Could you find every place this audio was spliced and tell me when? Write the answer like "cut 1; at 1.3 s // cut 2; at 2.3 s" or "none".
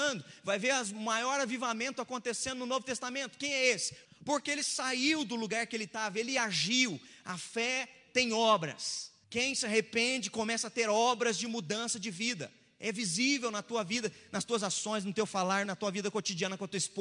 cut 1; at 4.1 s // cut 2; at 9.2 s // cut 3; at 15.7 s